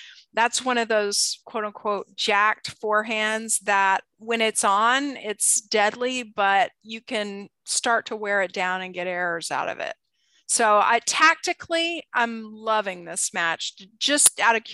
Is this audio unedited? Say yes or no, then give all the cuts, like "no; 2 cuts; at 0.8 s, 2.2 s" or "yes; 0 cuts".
no; 1 cut; at 4.2 s